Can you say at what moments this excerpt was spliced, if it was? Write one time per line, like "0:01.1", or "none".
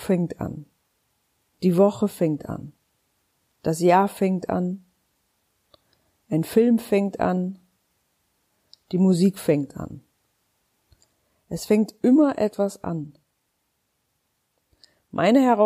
none